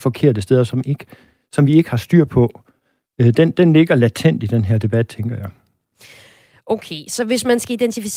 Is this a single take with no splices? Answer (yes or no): yes